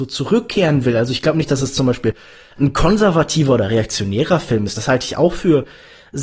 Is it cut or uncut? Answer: uncut